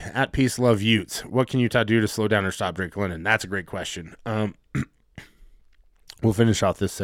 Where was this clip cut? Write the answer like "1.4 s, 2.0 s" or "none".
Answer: none